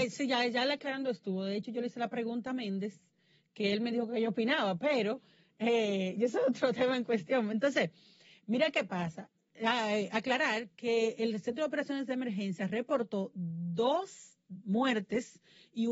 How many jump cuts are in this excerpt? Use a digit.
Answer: 0